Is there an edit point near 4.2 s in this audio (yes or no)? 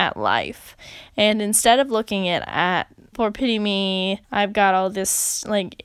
yes